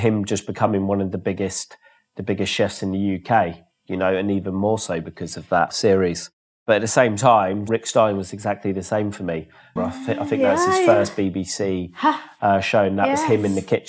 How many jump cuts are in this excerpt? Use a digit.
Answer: 1